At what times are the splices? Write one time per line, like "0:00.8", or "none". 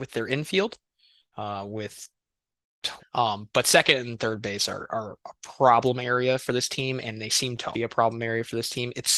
0:03.0
0:07.7